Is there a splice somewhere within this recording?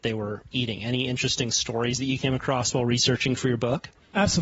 no; 0 cuts

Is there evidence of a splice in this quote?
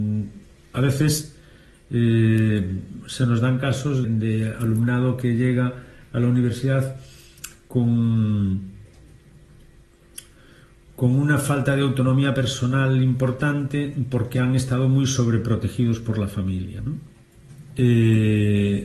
yes; 2 cuts; at 4.0 s, 16.8 s

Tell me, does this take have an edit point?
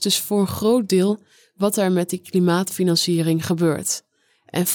no; 0 cuts

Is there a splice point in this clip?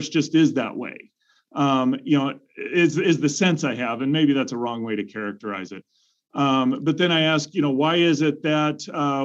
no; 0 cuts

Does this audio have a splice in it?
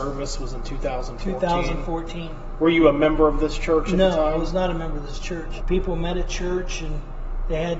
yes; 1 cut; at 5.6 s

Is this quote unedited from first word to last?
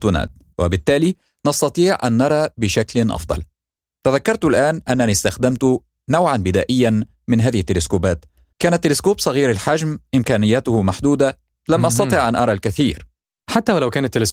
no; 1 cut; at 8.5 s

